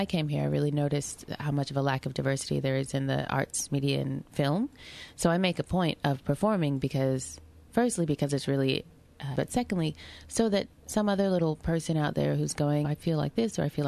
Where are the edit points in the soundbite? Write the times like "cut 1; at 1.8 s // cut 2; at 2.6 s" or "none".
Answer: cut 1; at 9.4 s // cut 2; at 12.8 s